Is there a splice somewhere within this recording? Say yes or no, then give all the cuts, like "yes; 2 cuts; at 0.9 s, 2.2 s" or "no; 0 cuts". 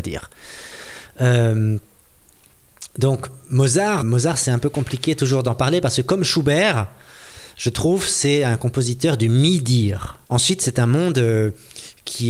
yes; 2 cuts; at 4.0 s, 10.2 s